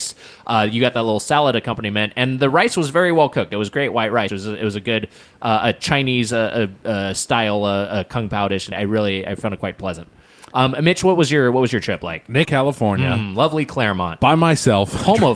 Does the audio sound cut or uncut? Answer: cut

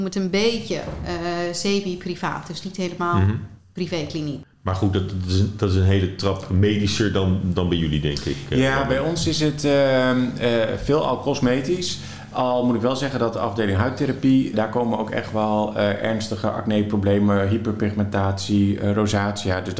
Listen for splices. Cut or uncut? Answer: cut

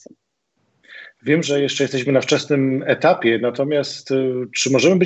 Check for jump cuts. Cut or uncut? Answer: uncut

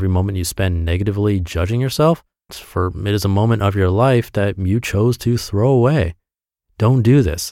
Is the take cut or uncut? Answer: cut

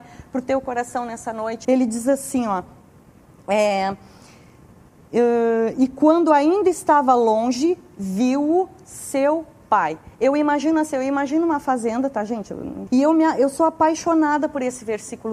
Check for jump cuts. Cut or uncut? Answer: cut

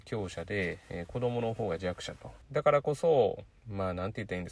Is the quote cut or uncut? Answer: cut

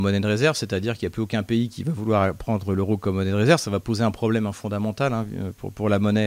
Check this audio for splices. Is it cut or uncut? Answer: uncut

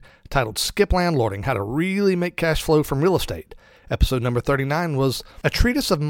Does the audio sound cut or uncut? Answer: uncut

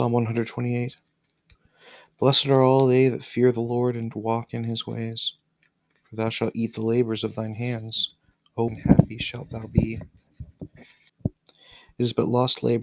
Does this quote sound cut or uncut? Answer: cut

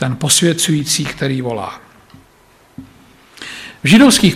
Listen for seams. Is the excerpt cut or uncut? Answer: uncut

